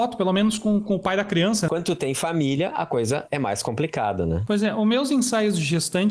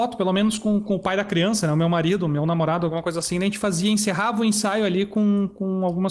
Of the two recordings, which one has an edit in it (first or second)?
first